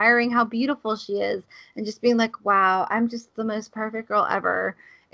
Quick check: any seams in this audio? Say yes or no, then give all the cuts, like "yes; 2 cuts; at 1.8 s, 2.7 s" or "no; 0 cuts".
no; 0 cuts